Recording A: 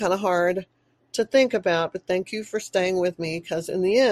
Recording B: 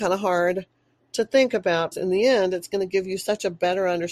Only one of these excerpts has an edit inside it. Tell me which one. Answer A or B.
B